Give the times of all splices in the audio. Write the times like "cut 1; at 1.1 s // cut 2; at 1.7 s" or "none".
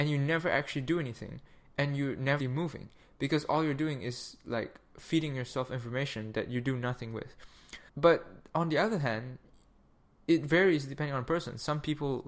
cut 1; at 2.4 s // cut 2; at 7.9 s